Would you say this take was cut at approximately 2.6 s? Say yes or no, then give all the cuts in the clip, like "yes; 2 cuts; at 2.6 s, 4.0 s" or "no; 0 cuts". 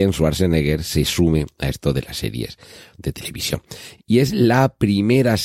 no; 1 cut; at 4.0 s